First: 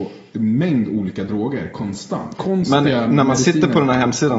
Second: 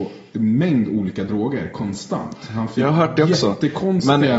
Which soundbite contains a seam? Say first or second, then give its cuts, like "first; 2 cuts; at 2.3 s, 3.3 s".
first; 1 cut; at 2.4 s